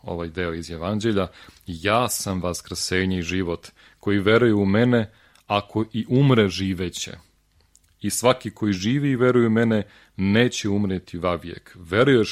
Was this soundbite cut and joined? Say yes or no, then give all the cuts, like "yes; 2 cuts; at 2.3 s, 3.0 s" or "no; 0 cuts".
no; 0 cuts